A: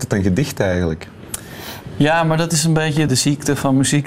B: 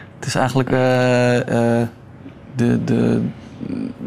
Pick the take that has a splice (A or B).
A